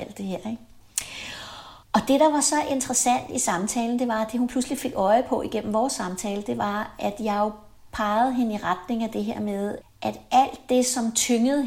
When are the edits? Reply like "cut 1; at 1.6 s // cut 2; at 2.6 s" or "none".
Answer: cut 1; at 1.8 s // cut 2; at 9.8 s